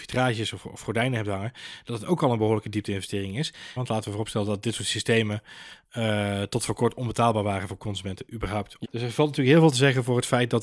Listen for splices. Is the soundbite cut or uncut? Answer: cut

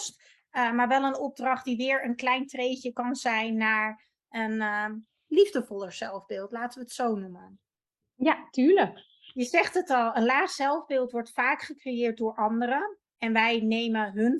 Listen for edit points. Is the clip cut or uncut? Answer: uncut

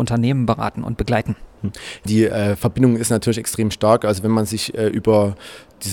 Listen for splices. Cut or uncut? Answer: cut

